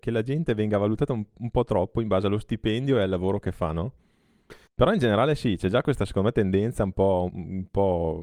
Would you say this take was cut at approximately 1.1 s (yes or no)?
no